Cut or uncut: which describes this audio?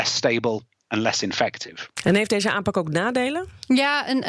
uncut